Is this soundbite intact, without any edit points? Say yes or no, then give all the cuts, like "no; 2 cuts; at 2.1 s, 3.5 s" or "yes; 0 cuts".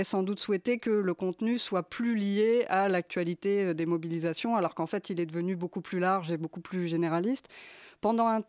yes; 0 cuts